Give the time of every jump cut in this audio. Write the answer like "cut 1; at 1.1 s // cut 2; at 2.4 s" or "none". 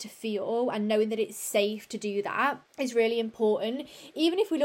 cut 1; at 2.7 s

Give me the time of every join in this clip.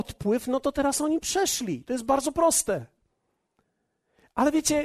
none

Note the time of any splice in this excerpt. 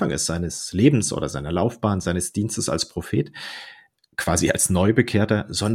none

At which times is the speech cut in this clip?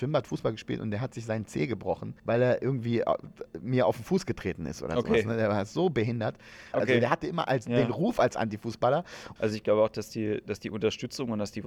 cut 1; at 2.2 s // cut 2; at 6.7 s // cut 3; at 9.4 s

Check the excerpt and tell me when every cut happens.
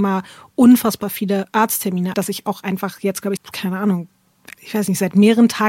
cut 1; at 2.1 s // cut 2; at 3.4 s // cut 3; at 4.5 s

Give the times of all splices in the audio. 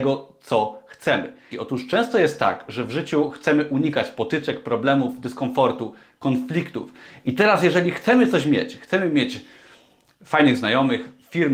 cut 1; at 1.5 s

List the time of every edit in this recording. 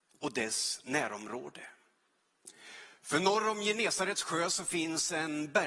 none

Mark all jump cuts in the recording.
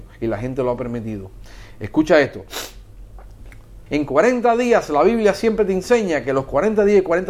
cut 1; at 3.9 s

